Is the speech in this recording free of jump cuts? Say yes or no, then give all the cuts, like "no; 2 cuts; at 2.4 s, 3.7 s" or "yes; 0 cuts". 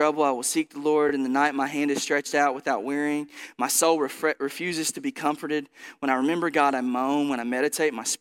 yes; 0 cuts